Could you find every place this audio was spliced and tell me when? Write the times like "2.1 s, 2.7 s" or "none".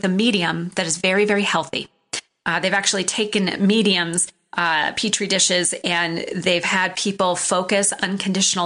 none